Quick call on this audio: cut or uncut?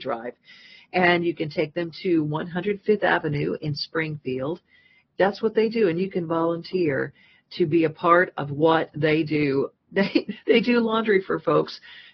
cut